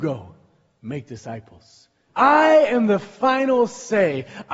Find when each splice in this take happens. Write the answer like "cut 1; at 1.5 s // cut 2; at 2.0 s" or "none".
cut 1; at 2.1 s